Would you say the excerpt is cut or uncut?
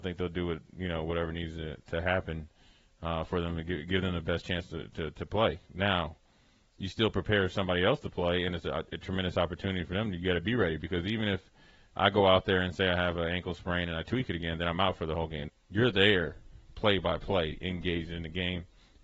cut